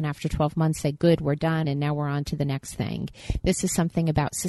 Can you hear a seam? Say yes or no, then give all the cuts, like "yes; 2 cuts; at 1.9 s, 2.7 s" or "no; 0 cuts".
yes; 1 cut; at 1.6 s